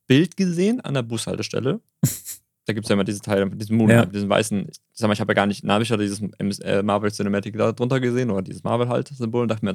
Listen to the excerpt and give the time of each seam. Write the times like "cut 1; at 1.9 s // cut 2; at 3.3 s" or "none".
none